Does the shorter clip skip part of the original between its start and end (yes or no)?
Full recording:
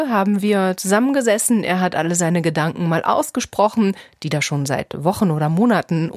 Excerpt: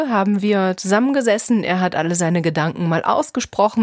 no